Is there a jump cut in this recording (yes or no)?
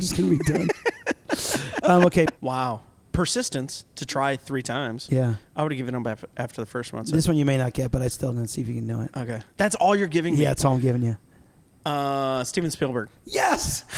yes